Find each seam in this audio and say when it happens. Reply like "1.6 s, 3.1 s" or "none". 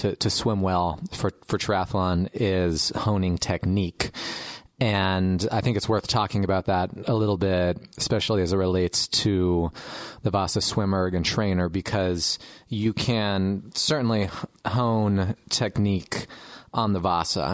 none

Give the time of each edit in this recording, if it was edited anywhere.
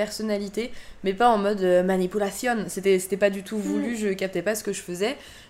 none

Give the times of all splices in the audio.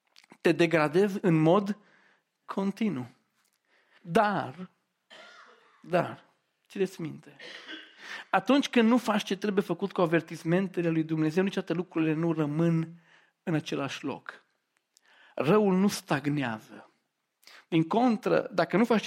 4.0 s

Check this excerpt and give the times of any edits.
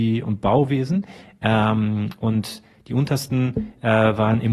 none

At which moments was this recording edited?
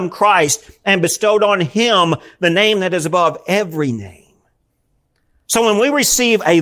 none

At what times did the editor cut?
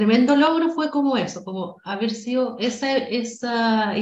none

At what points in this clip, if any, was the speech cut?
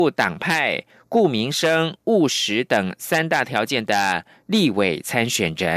none

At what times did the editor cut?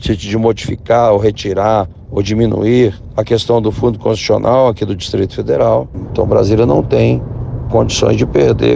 none

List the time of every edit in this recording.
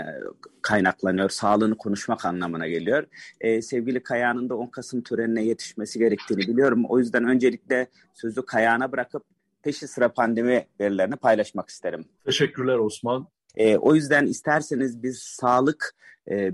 12.2 s, 13.5 s

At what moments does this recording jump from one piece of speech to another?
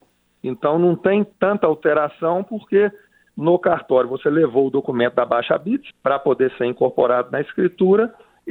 5.9 s

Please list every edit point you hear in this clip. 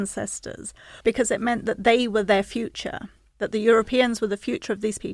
1.0 s

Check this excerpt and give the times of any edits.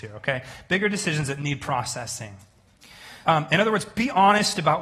3.2 s

